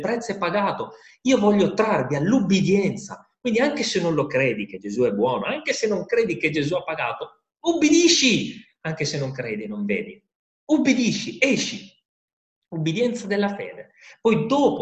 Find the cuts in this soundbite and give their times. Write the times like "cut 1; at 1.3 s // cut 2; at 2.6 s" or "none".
none